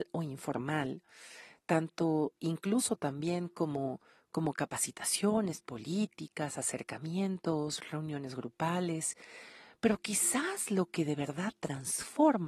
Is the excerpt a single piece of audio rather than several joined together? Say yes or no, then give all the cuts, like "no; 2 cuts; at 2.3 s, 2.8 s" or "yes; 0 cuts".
yes; 0 cuts